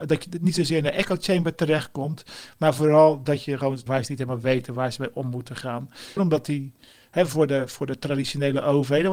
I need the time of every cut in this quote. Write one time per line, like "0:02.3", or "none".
0:03.9
0:06.2